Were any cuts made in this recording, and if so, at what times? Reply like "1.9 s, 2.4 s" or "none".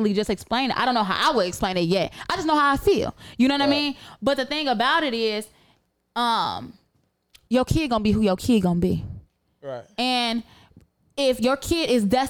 7.5 s